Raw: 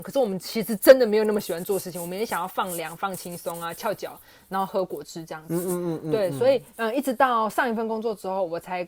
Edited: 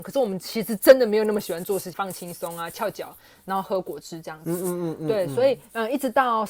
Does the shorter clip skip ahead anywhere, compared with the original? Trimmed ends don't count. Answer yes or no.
yes